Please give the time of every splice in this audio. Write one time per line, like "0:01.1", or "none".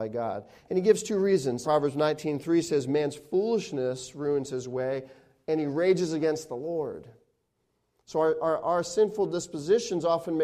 0:01.6